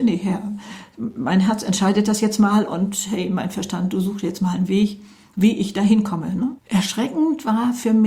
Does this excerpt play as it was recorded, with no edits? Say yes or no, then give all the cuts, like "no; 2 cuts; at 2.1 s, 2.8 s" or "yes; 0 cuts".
no; 1 cut; at 6.6 s